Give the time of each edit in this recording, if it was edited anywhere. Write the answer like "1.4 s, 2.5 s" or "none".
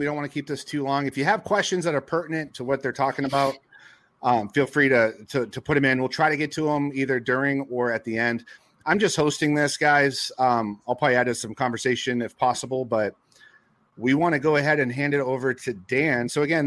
none